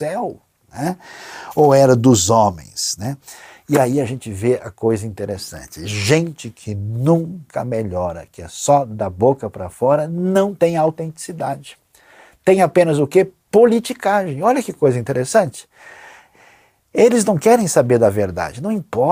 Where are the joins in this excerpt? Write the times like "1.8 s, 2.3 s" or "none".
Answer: none